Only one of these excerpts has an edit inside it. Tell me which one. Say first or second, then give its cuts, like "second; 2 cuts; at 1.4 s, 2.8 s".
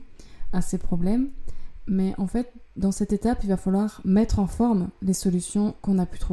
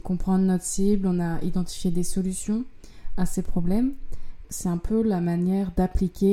second; 1 cut; at 4.4 s